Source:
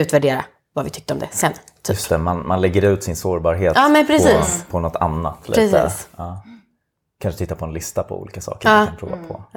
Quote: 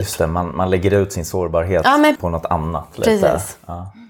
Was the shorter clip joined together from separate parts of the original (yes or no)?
yes